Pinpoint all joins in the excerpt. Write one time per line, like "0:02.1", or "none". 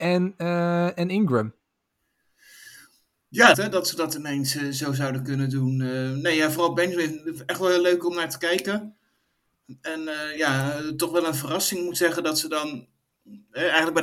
0:03.5